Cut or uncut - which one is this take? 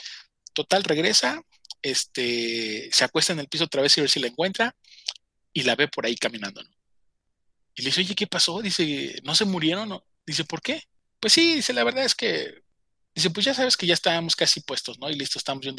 cut